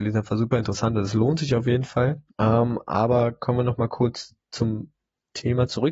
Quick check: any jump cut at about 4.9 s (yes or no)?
no